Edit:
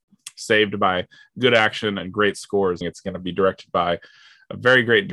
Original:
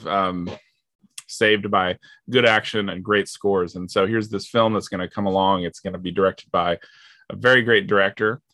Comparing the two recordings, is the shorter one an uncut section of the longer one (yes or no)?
no